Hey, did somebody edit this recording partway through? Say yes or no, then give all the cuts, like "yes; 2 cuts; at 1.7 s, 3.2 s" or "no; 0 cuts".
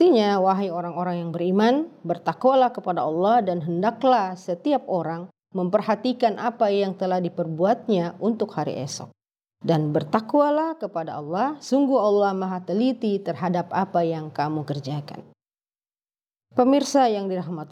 no; 0 cuts